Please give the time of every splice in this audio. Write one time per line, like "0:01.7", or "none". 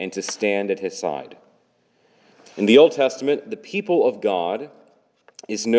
none